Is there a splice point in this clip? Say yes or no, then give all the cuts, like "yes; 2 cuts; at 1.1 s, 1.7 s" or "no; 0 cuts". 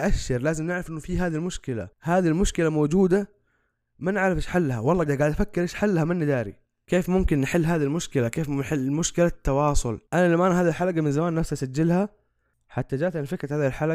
yes; 3 cuts; at 1.9 s, 5.1 s, 10.1 s